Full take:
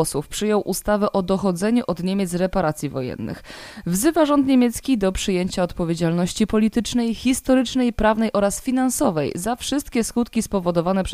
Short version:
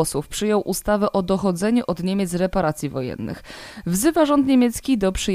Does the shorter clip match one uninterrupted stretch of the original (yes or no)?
yes